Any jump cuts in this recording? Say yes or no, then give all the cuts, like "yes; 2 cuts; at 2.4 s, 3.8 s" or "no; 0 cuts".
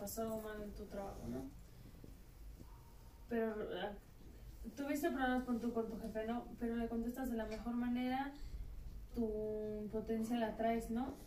yes; 1 cut; at 9.1 s